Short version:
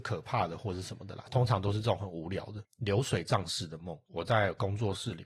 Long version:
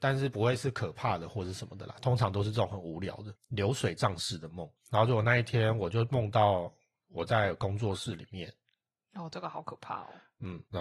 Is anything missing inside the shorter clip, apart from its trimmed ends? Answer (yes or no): yes